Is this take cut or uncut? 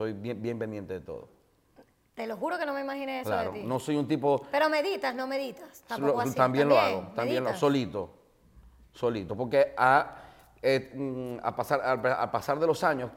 uncut